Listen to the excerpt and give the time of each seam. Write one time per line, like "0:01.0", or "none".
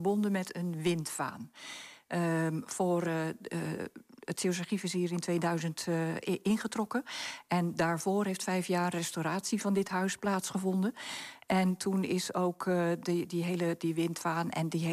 none